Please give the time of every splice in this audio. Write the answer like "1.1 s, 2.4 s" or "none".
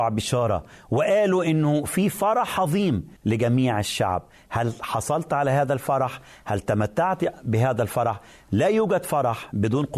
3.2 s